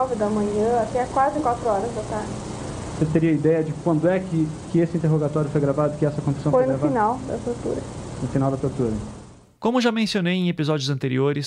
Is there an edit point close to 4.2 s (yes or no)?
no